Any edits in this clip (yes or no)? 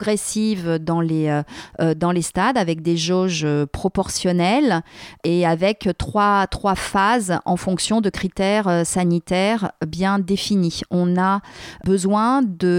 no